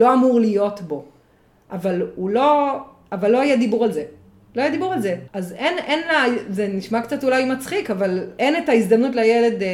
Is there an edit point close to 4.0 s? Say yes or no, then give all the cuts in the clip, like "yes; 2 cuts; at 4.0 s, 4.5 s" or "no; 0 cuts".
no; 2 cuts; at 5.3 s, 8.4 s